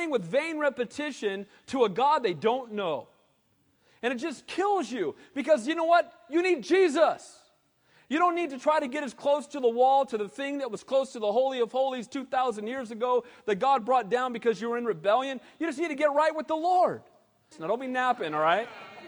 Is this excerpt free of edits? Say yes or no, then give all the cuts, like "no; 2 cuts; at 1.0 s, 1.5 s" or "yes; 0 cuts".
no; 1 cut; at 17.5 s